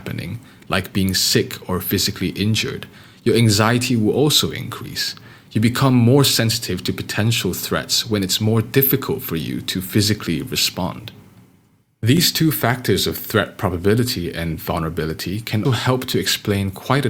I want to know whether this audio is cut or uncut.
cut